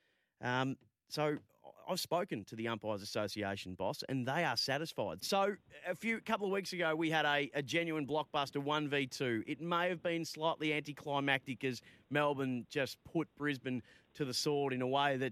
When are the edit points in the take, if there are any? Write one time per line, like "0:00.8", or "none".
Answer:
0:05.2